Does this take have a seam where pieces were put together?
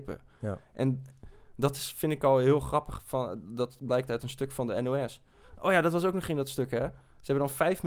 no; 0 cuts

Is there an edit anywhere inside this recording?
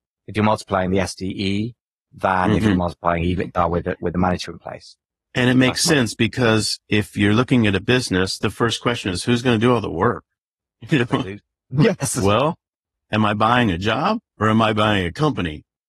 no; 0 cuts

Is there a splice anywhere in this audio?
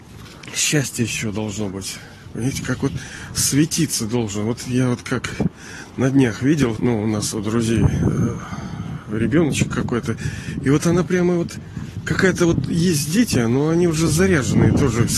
yes; 1 cut; at 6.8 s

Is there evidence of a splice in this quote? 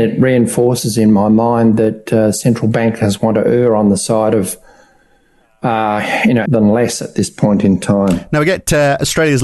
yes; 1 cut; at 6.5 s

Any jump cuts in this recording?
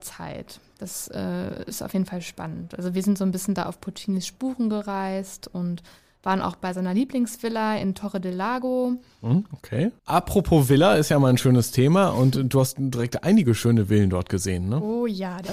yes; 1 cut; at 10.0 s

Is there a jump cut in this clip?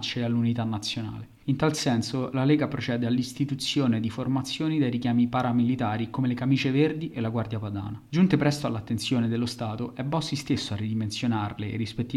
no; 0 cuts

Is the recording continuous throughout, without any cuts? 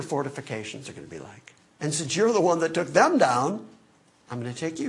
no; 1 cut; at 1.7 s

